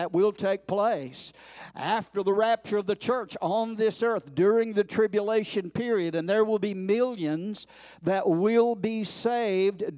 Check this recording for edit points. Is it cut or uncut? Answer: uncut